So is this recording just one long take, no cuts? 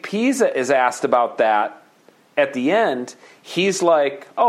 yes; 0 cuts

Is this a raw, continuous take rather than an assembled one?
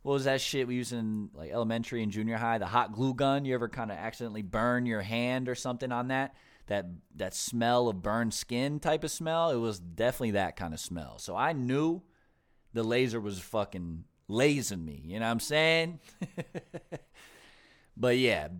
no; 1 cut; at 1.3 s

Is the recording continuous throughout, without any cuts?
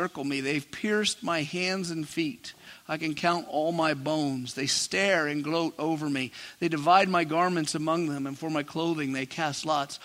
yes; 0 cuts

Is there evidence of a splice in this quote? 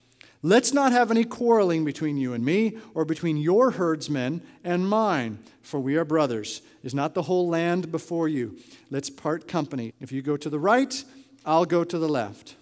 yes; 1 cut; at 9.9 s

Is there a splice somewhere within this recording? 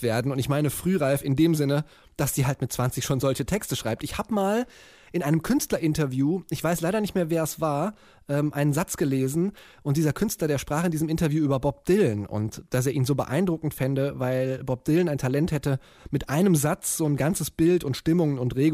no; 0 cuts

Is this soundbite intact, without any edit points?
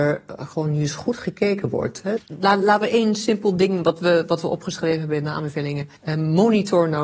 no; 1 cut; at 6.0 s

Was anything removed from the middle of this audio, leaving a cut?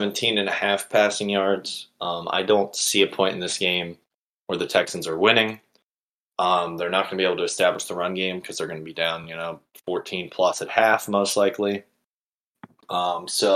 no; 0 cuts

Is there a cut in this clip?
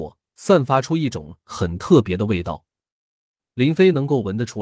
no; 0 cuts

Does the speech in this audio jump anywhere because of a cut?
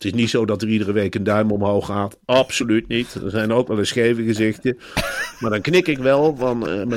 no; 0 cuts

